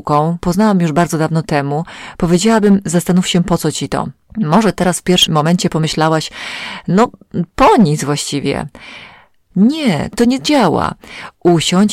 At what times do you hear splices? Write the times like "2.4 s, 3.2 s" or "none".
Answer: 5.3 s, 9.5 s